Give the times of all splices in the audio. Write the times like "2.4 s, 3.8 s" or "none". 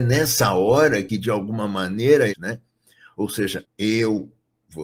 2.3 s, 3.6 s